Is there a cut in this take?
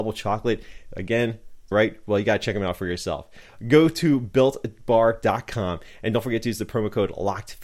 yes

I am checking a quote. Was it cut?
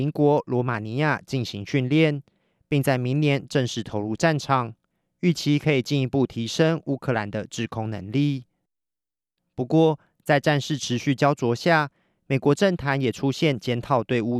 no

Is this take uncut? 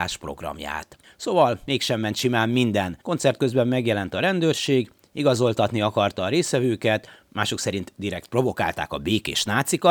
no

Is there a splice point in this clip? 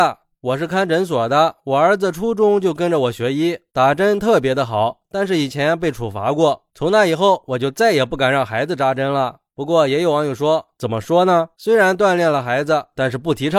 yes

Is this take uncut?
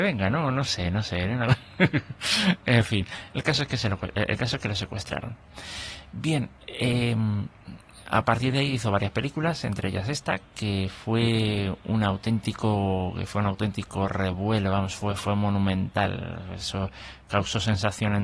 yes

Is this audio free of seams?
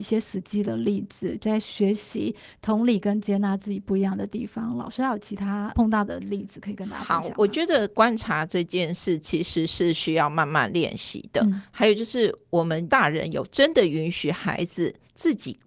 yes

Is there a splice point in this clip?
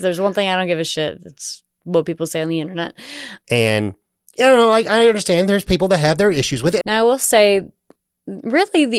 yes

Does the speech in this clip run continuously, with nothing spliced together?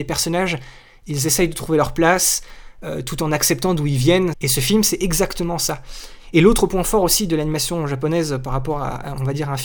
no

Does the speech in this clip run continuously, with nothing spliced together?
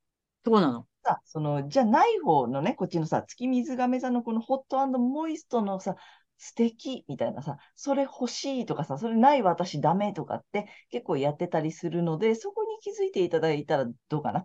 yes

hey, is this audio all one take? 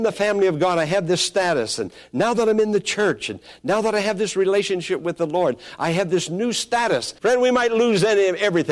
no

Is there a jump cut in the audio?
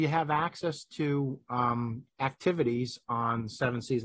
yes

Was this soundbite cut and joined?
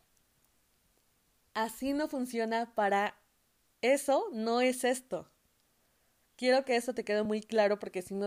no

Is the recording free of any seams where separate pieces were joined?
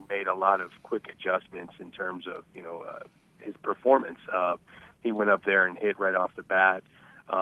yes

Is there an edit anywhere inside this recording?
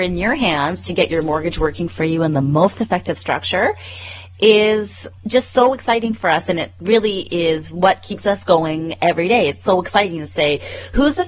yes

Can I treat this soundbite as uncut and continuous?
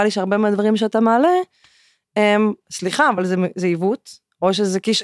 yes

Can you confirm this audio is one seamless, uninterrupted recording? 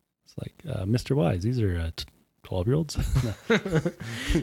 yes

